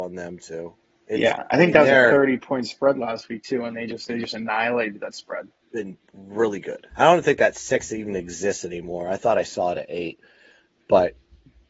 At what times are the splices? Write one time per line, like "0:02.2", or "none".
0:05.6
0:06.9